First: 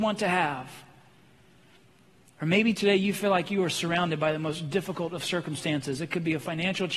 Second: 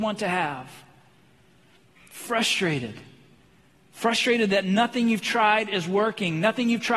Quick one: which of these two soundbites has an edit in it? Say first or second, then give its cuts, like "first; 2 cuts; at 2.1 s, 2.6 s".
second; 1 cut; at 1.9 s